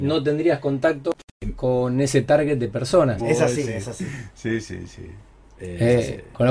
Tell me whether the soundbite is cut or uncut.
cut